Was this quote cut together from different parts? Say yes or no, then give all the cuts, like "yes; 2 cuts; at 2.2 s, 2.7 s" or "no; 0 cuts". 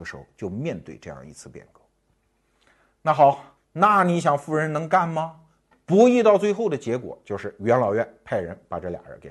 yes; 2 cuts; at 3.6 s, 5.7 s